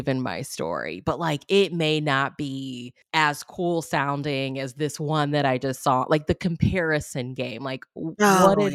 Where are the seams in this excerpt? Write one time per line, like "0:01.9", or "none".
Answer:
none